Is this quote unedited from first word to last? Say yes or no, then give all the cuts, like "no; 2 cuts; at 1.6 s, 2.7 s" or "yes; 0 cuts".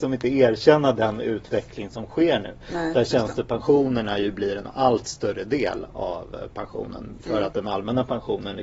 yes; 0 cuts